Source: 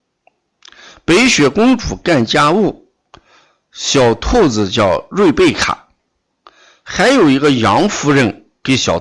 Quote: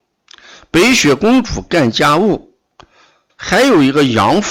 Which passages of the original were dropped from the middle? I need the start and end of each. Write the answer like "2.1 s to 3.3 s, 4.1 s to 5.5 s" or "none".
3.6 s to 6.8 s

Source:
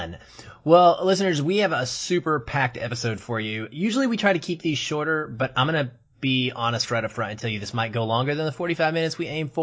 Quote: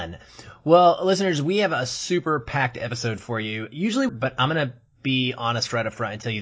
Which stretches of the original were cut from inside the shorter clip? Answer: 4.1 s to 5.3 s

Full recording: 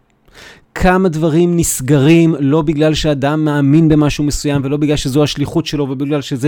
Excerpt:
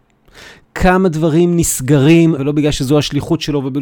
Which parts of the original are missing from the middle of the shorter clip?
2.4 s to 4.6 s

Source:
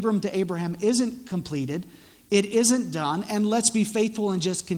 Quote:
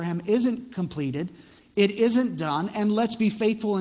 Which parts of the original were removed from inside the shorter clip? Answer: none

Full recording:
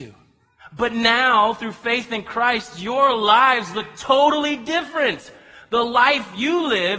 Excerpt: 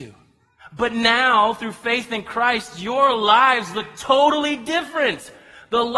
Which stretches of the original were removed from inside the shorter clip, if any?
none

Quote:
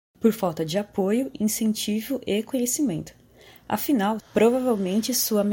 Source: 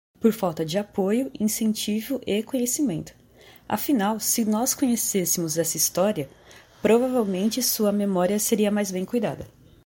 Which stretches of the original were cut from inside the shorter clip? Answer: 4.2 s to 6.7 s

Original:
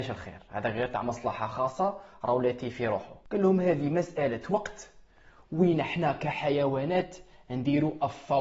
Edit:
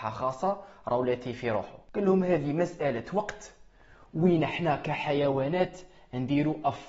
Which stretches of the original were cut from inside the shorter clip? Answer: none

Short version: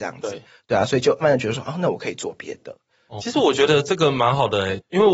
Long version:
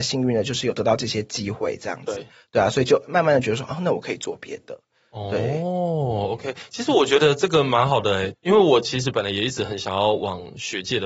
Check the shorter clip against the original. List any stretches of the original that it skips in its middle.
3.0 s to 3.2 s, 5.2 s to 6.7 s

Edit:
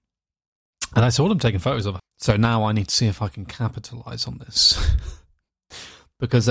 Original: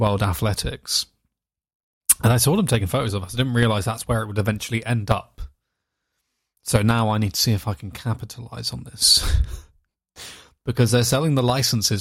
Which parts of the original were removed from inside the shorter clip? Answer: 3.3 s to 6.4 s

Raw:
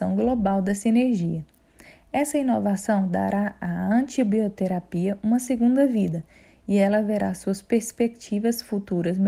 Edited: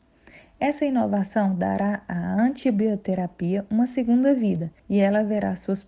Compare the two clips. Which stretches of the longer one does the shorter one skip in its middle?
6.3 s to 6.6 s

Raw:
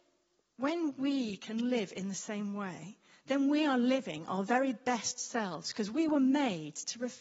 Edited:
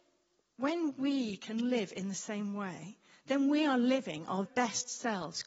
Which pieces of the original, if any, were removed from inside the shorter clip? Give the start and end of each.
4.4 s to 4.7 s

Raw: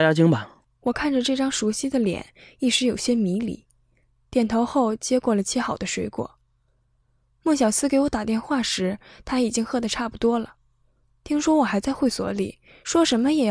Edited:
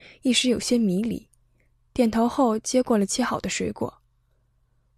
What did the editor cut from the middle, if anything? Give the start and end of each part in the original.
none

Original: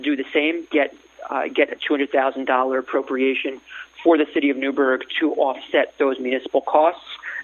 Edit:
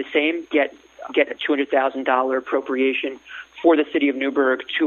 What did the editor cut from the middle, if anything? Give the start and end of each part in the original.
1.3 s to 1.5 s

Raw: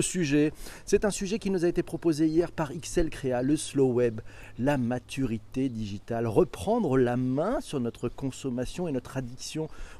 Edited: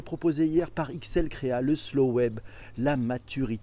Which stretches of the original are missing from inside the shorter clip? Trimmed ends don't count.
none

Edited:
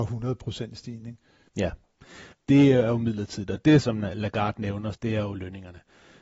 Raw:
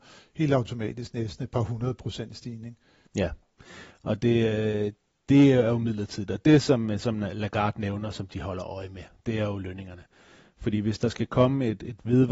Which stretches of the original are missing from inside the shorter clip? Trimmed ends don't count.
3.9 s to 5.1 s, 6.6 s to 7.0 s, 8.1 s to 9.2 s

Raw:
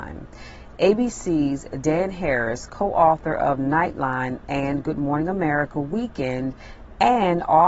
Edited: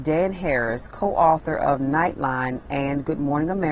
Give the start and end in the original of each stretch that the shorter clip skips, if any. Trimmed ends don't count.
none

